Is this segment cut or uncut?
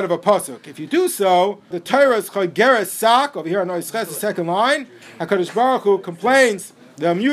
cut